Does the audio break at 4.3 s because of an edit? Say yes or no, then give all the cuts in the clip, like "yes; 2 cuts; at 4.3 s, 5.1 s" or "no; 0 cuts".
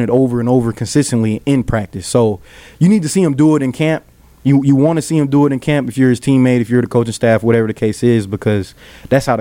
no; 0 cuts